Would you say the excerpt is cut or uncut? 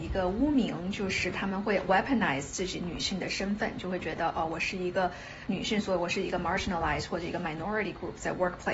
uncut